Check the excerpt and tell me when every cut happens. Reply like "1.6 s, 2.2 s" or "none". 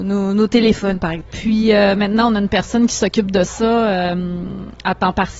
1.3 s

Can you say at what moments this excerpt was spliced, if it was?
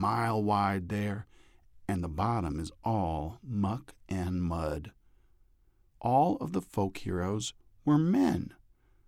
1.7 s, 5.9 s

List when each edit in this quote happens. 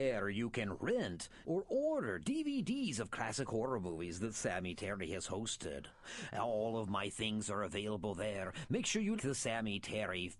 1.4 s, 9.2 s

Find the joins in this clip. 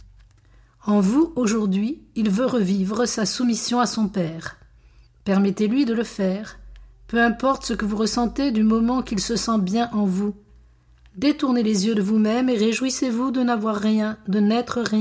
none

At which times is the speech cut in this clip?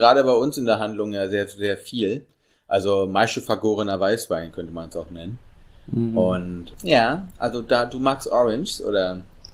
none

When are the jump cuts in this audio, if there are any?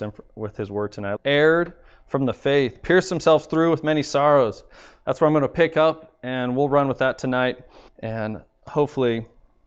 1.2 s, 7.9 s

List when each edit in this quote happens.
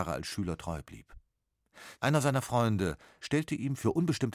2.0 s, 3.2 s

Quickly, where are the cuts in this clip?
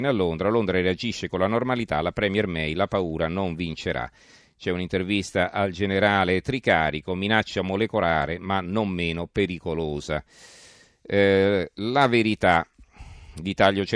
none

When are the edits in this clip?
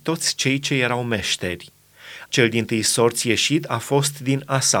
2.3 s

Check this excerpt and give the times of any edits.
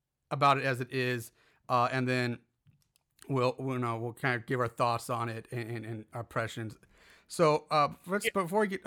none

